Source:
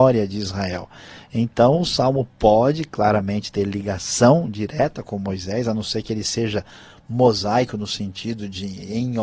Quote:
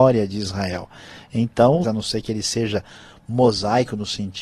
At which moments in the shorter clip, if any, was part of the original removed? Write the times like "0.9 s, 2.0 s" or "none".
1.8 s